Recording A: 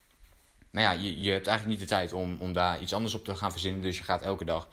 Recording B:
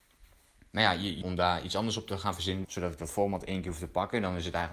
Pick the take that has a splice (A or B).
B